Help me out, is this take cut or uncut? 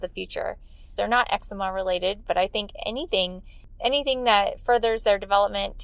cut